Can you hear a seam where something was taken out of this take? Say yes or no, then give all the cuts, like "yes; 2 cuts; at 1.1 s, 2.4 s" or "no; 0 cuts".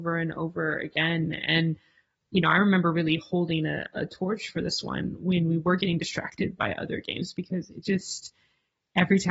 no; 0 cuts